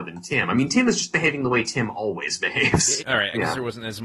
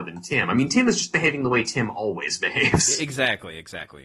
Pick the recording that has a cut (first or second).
first